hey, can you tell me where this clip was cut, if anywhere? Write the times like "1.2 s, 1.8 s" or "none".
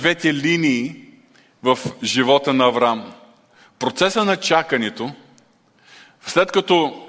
none